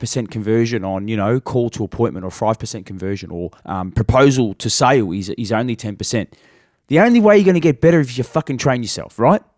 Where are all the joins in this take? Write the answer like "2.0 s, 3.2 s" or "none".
3.6 s